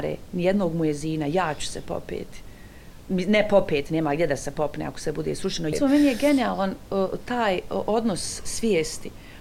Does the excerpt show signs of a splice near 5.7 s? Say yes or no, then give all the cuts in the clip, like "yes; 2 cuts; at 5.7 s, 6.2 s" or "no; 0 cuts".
yes; 1 cut; at 5.7 s